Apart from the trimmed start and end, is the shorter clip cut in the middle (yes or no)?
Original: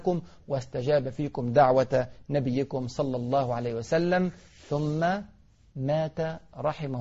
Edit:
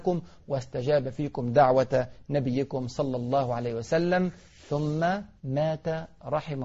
yes